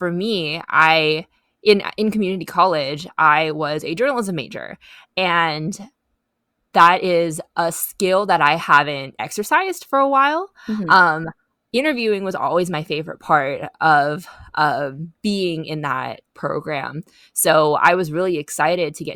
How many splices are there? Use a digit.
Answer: 0